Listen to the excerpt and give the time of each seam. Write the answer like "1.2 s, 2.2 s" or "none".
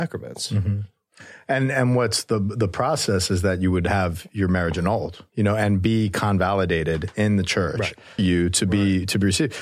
5.3 s, 8.2 s

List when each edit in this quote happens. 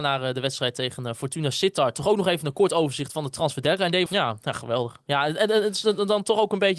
4.1 s

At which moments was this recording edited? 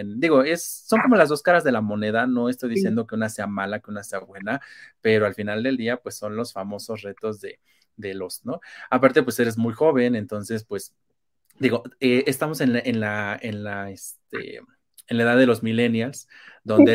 8.4 s

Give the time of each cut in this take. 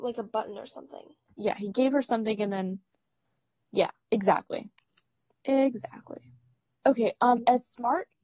6.7 s

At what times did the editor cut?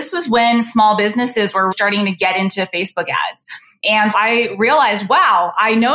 1.7 s, 4.1 s

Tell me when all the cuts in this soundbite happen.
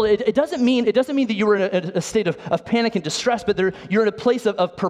none

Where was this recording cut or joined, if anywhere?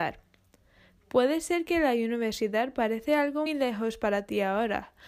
3.5 s

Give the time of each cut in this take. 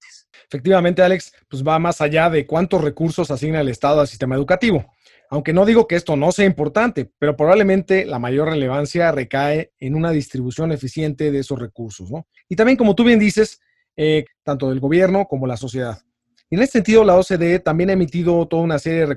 12.4 s, 14.3 s

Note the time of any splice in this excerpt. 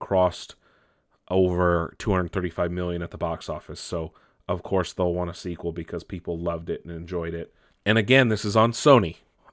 7.7 s

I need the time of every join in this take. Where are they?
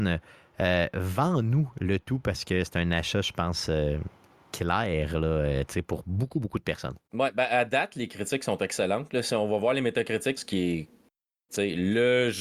7.1 s, 10.4 s

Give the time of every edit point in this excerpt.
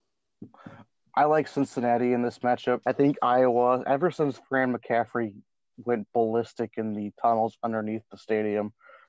2.8 s

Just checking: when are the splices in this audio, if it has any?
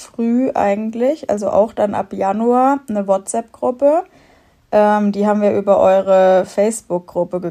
none

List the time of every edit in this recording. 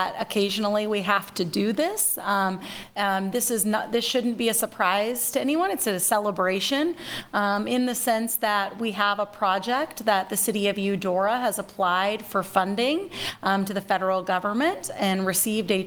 none

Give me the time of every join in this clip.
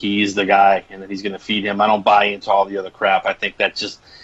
none

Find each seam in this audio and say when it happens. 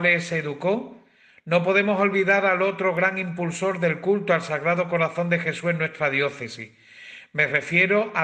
none

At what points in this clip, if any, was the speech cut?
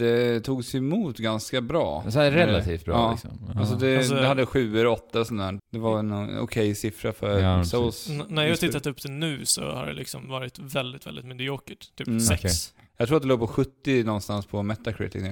5.6 s

